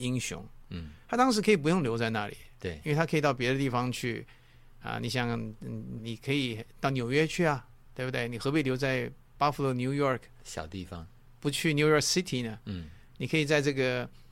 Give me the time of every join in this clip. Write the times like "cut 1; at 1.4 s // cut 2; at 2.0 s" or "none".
cut 1; at 6.0 s